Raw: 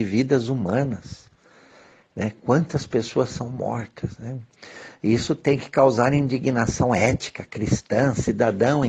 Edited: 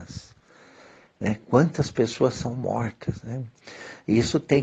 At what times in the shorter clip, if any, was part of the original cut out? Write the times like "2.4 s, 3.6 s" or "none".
none